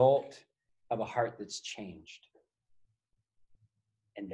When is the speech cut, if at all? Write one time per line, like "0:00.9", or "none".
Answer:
none